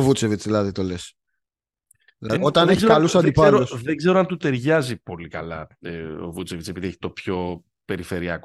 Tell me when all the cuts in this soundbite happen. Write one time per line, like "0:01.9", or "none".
0:02.4